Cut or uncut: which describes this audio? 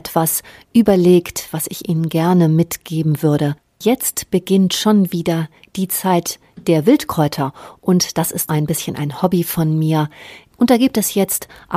cut